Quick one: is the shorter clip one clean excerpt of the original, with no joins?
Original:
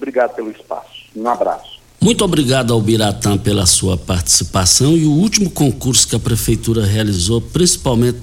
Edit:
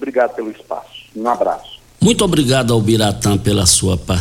yes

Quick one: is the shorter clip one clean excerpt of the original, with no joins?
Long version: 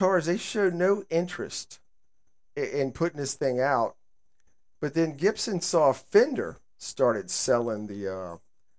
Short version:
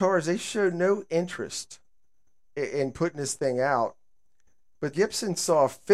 no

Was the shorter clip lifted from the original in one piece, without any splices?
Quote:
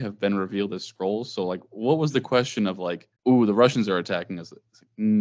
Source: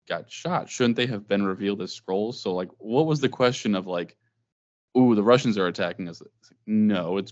no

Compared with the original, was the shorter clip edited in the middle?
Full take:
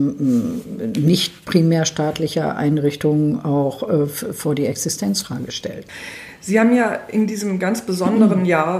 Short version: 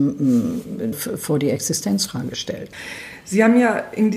yes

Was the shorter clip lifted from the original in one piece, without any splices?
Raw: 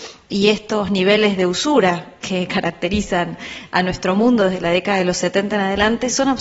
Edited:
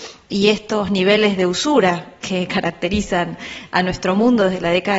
yes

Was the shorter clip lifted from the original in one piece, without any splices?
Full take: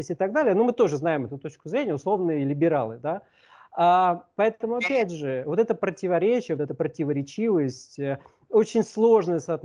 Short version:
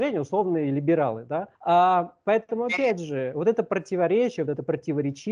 no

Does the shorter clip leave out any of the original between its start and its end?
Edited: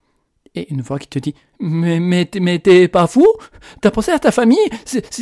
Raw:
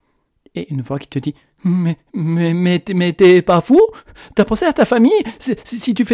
yes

